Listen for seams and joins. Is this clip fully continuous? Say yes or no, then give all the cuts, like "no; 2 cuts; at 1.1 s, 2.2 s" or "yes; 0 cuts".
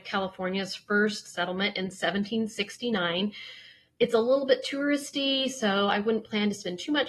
yes; 0 cuts